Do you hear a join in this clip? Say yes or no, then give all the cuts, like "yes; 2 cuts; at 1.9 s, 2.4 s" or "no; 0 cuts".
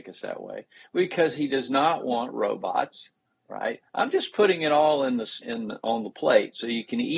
yes; 2 cuts; at 3.8 s, 5.4 s